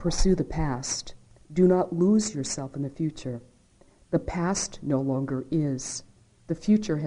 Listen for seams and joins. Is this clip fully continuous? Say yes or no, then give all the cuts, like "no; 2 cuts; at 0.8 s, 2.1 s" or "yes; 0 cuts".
yes; 0 cuts